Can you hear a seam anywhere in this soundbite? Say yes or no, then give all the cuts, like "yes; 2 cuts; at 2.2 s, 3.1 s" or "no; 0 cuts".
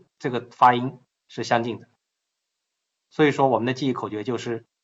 no; 0 cuts